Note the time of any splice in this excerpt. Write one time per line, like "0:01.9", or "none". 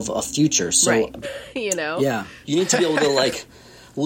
0:01.2
0:02.4